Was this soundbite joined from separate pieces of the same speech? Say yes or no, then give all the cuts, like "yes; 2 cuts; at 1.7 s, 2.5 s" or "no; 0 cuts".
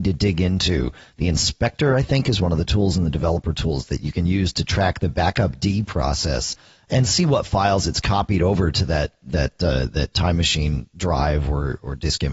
no; 0 cuts